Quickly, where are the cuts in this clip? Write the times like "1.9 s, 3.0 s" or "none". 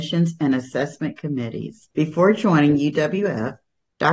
1.9 s

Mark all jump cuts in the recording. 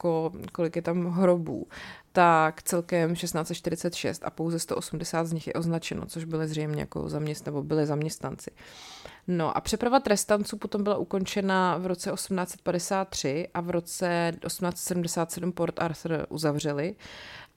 none

